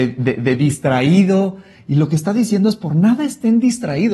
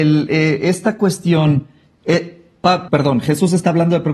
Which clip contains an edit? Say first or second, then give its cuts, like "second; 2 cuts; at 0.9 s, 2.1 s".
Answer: second; 1 cut; at 2.9 s